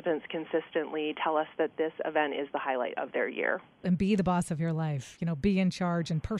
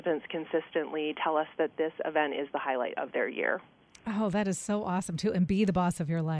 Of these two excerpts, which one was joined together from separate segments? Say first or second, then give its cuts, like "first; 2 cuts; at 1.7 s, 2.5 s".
first; 1 cut; at 3.8 s